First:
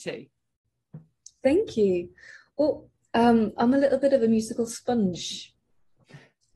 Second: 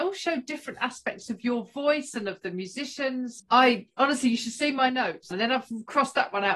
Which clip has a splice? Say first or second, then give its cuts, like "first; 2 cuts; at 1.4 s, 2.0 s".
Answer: second; 2 cuts; at 3.4 s, 5.3 s